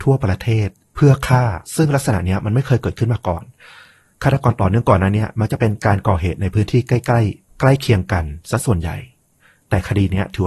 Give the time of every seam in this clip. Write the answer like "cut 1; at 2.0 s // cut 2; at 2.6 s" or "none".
cut 1; at 1.6 s